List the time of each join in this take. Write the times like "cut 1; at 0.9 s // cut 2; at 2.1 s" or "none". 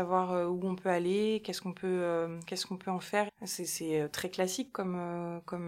cut 1; at 3.3 s